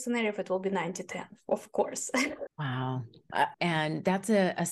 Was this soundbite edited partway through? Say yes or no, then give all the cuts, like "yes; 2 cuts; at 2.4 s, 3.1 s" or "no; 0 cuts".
yes; 2 cuts; at 2.5 s, 3.5 s